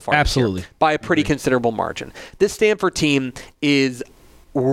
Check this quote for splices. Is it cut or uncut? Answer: uncut